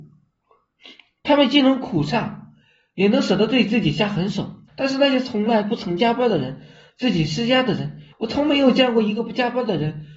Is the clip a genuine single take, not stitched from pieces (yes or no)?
no